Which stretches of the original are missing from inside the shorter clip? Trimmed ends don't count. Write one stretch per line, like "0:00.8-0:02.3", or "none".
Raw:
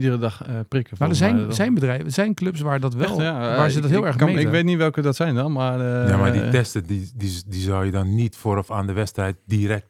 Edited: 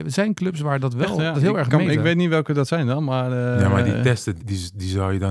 0:03.3-0:03.8
0:06.9-0:07.1